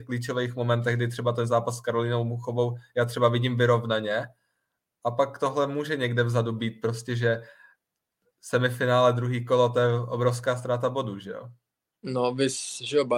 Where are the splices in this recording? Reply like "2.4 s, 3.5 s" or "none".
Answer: none